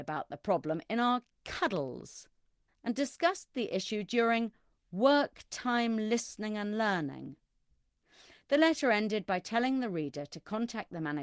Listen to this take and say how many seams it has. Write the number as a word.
one